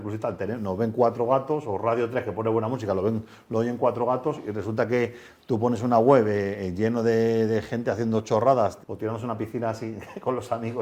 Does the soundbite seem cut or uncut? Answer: cut